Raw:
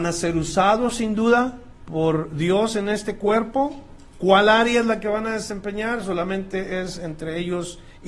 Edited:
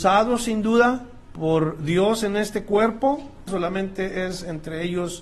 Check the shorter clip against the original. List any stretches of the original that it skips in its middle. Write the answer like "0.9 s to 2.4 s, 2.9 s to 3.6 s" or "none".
4.0 s to 6.0 s